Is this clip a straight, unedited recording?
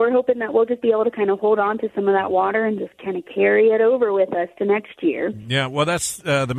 yes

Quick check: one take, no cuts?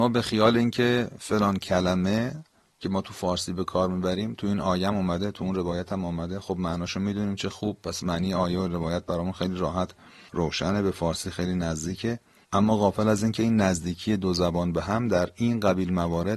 yes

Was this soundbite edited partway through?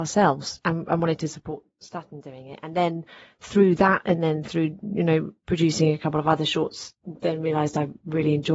no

